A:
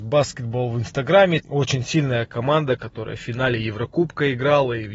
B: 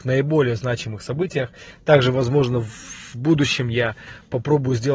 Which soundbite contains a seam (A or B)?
A